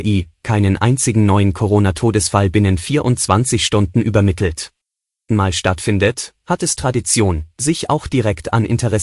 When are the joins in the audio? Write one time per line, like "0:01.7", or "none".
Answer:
0:05.3